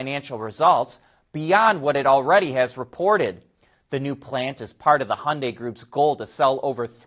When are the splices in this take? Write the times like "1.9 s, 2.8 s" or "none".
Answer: 3.7 s

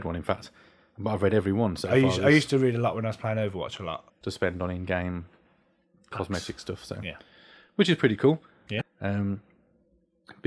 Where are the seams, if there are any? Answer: 4.1 s, 8.8 s

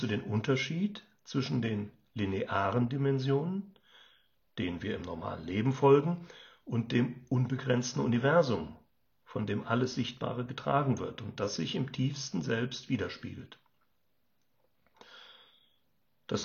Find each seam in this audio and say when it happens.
none

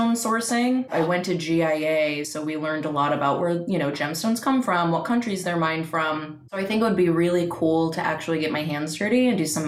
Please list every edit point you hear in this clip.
none

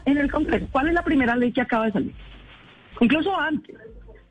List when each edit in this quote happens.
2.9 s

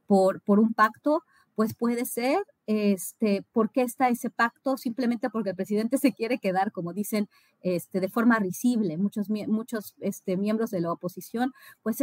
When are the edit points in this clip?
none

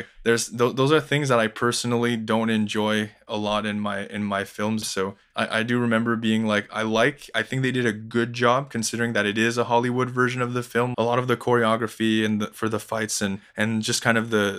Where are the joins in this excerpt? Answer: 4.8 s, 10.9 s

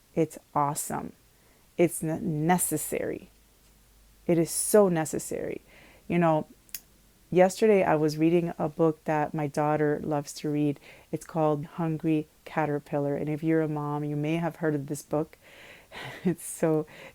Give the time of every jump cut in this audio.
11.6 s

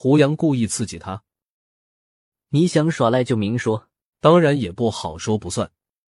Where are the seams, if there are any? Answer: 4.1 s

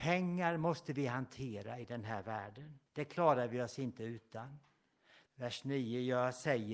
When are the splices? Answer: 2.9 s, 5.3 s

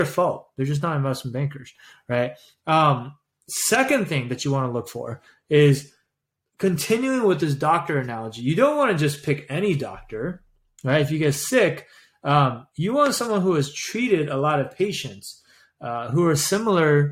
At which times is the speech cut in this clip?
none

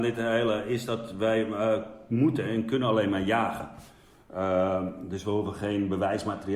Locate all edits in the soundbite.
none

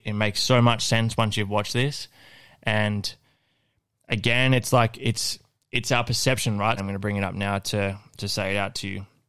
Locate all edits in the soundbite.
6.8 s

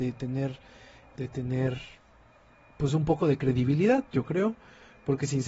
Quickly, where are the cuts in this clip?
1.2 s

